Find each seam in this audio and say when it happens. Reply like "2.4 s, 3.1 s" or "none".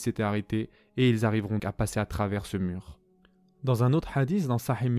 1.6 s